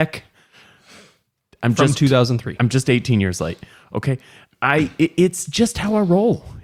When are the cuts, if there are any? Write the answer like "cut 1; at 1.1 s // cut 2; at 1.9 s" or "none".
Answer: none